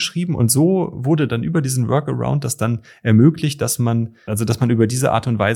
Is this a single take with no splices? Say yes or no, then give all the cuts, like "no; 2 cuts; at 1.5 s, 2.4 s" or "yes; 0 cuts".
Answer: yes; 0 cuts